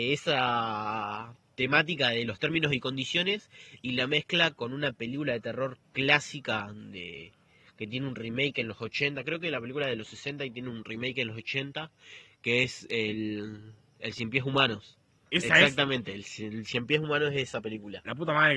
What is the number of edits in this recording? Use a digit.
1